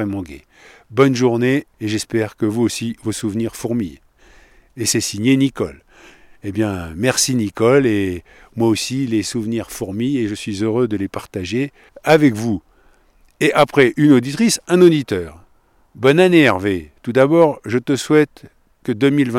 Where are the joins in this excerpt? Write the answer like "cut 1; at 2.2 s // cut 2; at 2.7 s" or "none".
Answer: none